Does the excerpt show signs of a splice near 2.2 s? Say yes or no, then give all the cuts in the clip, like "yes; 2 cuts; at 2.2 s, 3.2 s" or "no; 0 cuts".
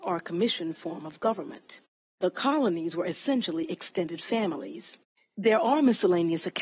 yes; 2 cuts; at 2.2 s, 5.1 s